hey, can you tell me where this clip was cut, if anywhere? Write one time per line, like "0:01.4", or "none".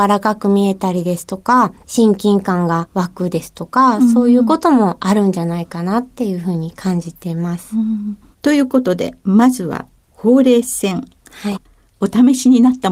0:08.3
0:11.6